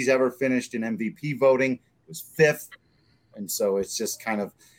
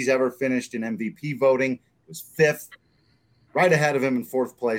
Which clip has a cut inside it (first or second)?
first